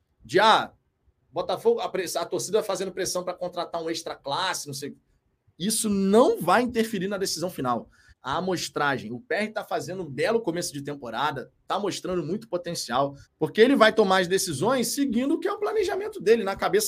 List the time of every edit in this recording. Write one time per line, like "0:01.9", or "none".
0:08.1
0:13.2